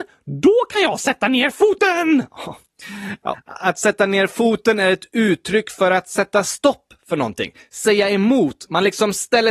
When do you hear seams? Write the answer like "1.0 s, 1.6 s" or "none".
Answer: 3.3 s